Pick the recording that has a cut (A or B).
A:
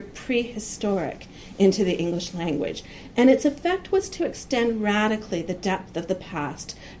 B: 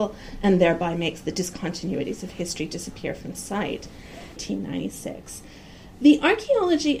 B